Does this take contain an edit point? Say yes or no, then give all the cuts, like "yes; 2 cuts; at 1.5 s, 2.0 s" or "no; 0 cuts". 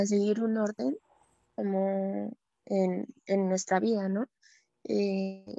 no; 0 cuts